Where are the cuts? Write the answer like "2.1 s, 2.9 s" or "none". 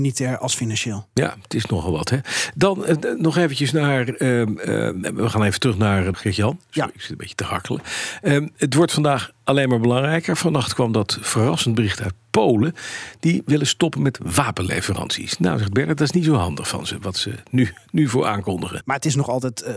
6.1 s, 18.8 s